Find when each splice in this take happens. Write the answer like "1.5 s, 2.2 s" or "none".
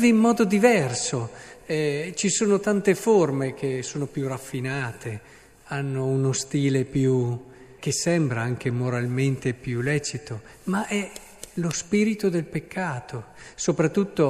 7.8 s